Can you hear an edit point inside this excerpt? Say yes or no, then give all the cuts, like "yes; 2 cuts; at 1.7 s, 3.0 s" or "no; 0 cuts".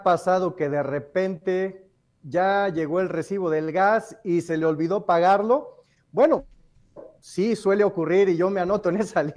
no; 0 cuts